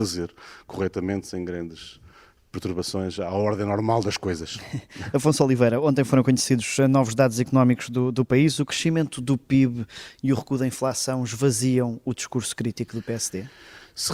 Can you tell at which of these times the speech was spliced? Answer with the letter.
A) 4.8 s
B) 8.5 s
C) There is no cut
C